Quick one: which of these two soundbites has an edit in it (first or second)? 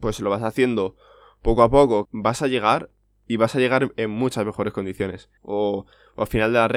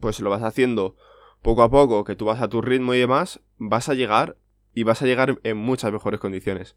first